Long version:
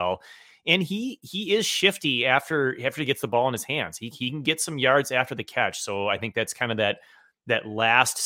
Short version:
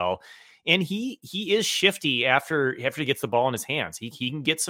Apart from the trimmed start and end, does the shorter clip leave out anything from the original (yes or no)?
no